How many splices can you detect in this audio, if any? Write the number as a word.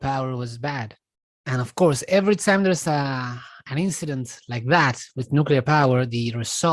one